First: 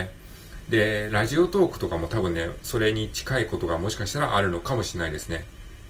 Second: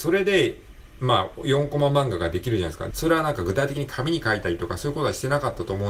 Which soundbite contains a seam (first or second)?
second